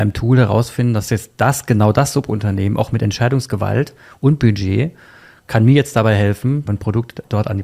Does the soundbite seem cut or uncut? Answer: cut